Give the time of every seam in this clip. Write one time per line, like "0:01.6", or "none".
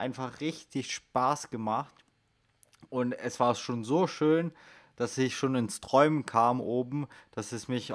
none